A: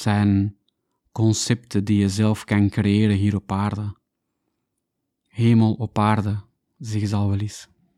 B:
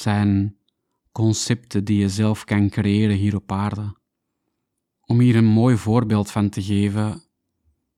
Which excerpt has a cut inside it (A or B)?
B